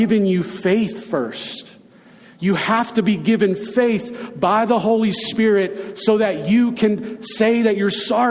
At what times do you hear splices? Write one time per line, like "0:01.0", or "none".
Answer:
none